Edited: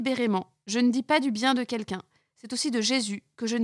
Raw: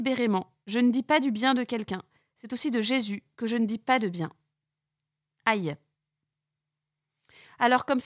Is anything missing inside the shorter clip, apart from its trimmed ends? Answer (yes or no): no